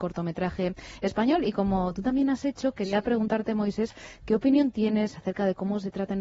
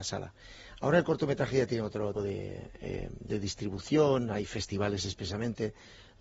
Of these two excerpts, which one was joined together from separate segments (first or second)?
second